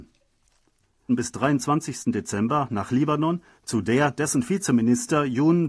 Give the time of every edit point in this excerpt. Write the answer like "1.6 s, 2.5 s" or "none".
1.1 s, 3.6 s